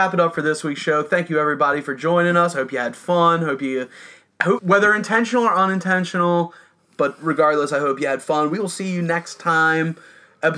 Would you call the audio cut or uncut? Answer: cut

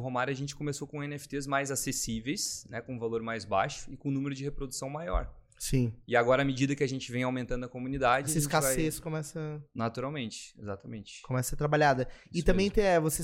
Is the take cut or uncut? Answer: uncut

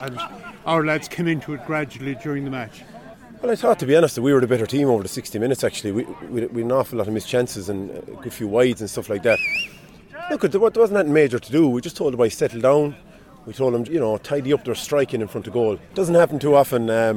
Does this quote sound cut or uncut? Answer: cut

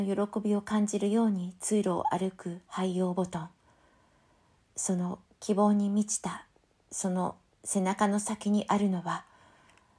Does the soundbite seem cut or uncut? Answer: uncut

